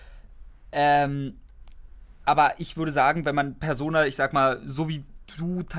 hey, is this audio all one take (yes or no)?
yes